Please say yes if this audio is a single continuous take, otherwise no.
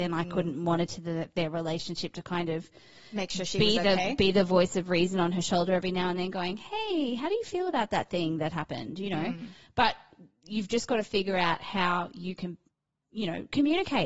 yes